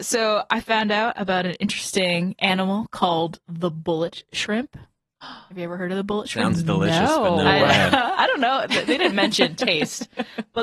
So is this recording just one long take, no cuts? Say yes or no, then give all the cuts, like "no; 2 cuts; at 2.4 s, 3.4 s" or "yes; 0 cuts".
yes; 0 cuts